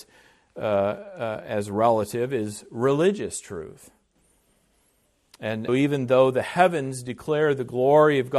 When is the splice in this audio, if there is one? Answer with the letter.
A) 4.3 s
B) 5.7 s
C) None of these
B